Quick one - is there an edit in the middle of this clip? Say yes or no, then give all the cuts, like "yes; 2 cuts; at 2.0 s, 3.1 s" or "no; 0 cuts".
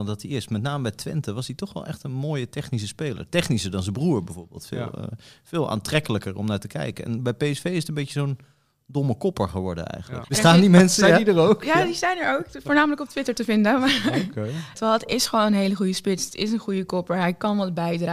yes; 2 cuts; at 10.2 s, 14.7 s